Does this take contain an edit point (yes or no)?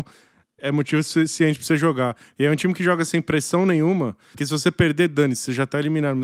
yes